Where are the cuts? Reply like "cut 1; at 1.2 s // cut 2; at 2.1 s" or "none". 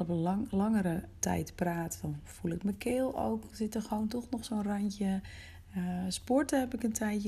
cut 1; at 1.2 s